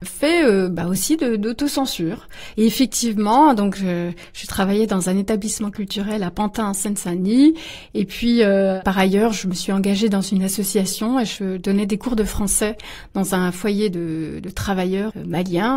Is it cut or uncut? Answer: cut